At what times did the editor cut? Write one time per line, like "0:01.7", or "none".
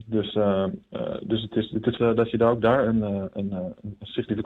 0:02.0